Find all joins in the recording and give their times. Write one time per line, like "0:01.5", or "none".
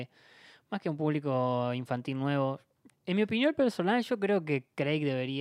0:02.9